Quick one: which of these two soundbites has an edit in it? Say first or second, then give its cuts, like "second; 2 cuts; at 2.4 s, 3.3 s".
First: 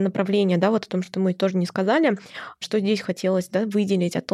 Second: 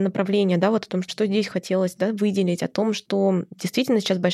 second; 1 cut; at 1.1 s